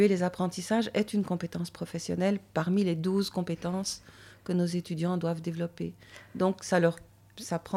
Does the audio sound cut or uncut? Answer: uncut